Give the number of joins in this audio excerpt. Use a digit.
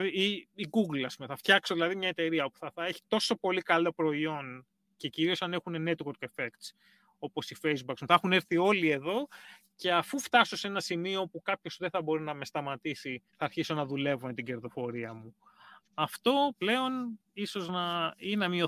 1